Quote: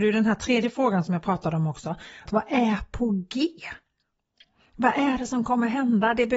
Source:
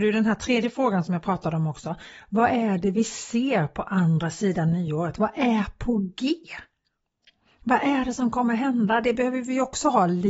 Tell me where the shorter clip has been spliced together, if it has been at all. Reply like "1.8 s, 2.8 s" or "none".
2.3 s

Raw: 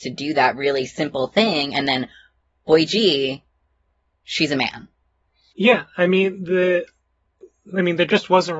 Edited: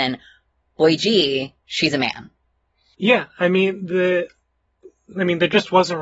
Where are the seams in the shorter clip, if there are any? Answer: 1.6 s

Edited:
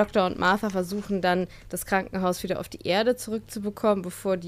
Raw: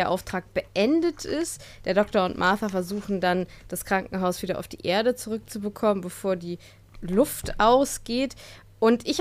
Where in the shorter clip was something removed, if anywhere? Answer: none

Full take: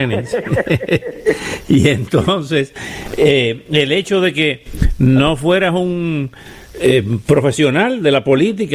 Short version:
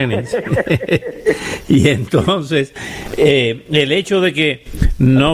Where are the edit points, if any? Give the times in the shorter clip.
none

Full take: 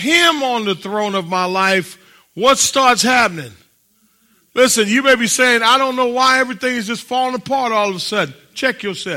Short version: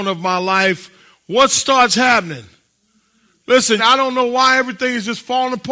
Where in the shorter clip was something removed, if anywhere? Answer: 3.8 s

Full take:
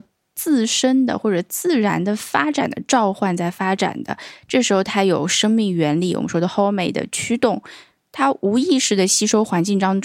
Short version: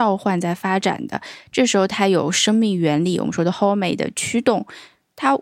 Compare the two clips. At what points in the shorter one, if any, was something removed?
none

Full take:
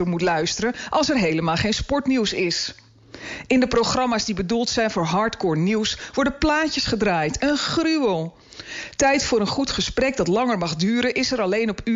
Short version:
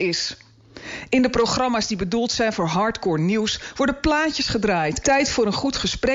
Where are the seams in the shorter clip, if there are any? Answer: 5.0 s

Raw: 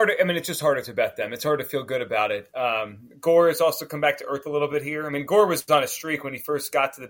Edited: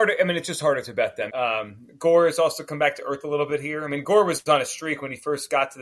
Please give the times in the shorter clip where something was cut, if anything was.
1.3 s

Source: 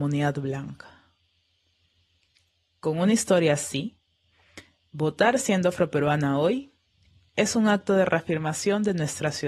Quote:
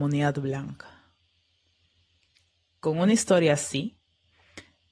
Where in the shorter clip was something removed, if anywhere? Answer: none

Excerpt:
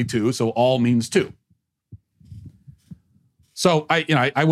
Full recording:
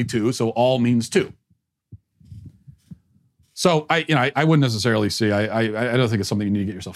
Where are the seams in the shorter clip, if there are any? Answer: none

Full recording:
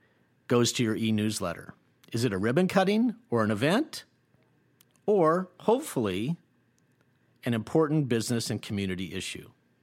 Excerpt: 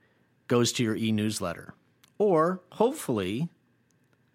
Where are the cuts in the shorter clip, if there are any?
2.0 s

